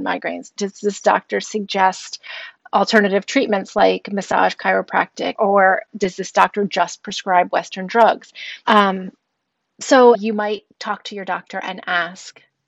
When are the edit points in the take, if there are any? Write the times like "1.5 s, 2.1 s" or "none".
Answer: 5.4 s, 8.6 s, 10.1 s